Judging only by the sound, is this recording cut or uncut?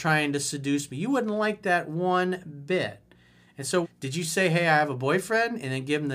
cut